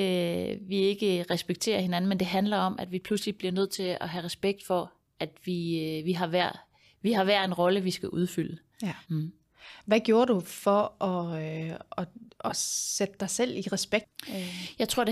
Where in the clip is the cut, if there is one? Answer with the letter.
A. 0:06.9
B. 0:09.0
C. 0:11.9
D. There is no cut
B